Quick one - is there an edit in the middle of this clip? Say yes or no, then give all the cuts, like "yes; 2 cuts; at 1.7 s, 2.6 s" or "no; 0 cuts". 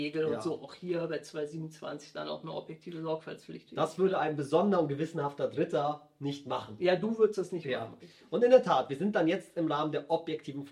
no; 0 cuts